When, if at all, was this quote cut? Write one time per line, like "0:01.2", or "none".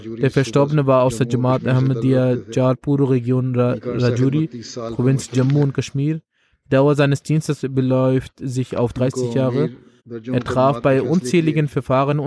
0:10.0